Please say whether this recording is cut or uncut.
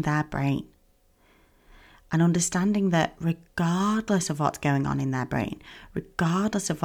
uncut